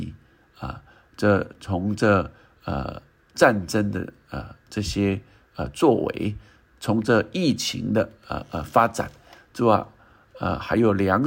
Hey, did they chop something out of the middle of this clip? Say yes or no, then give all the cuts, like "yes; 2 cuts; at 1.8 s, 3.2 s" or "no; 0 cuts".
no; 0 cuts